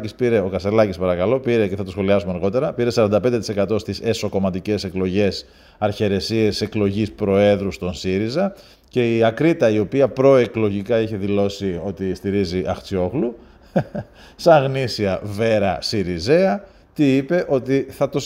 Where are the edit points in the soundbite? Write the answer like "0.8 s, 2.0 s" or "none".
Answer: 8.7 s